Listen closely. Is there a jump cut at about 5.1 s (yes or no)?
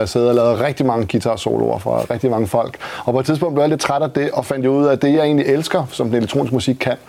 no